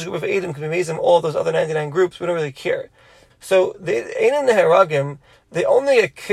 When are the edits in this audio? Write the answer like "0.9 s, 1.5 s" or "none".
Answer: 3.3 s, 5.3 s